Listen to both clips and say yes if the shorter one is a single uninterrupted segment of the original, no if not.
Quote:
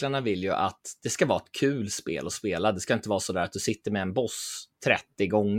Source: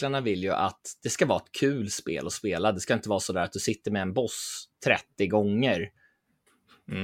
yes